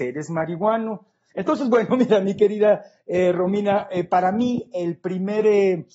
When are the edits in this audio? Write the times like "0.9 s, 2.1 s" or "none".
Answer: 1.3 s